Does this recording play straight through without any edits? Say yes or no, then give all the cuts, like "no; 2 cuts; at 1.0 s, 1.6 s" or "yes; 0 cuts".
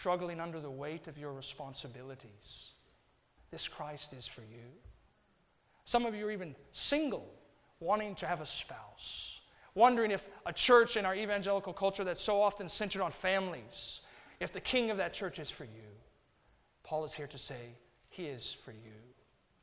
yes; 0 cuts